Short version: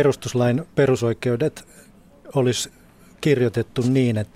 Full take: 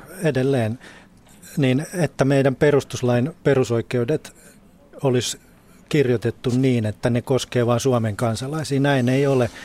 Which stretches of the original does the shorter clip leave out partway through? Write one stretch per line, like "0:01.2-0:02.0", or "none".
none